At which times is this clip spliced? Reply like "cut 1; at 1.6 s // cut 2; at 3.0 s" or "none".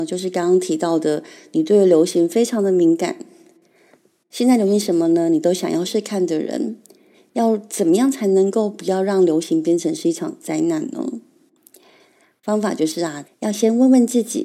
cut 1; at 5.9 s // cut 2; at 13.2 s